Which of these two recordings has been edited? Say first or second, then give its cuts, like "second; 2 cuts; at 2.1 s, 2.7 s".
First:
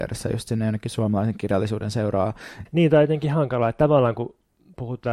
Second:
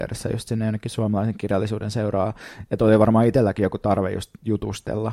first; 1 cut; at 2.7 s